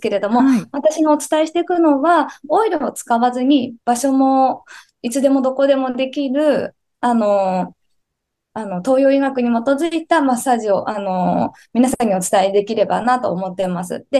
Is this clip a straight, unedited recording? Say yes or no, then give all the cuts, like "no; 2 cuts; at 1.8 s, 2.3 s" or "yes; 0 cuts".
no; 1 cut; at 8.5 s